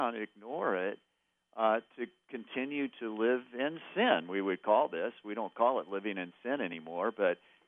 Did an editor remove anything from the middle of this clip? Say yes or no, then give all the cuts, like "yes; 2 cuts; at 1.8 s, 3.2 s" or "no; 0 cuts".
no; 0 cuts